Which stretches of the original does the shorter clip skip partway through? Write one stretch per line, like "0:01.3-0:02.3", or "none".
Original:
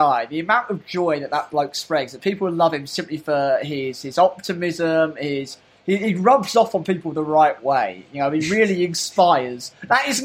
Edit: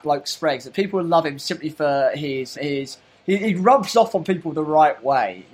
0:04.0-0:05.1